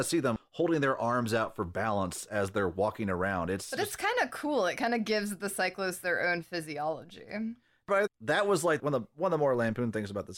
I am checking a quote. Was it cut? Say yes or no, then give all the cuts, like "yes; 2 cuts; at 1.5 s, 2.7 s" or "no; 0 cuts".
no; 0 cuts